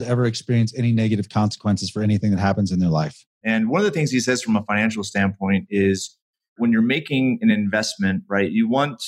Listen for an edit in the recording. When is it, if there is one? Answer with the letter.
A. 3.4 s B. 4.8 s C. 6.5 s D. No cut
A